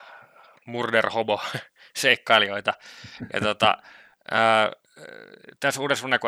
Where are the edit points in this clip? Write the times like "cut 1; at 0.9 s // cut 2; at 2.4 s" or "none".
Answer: none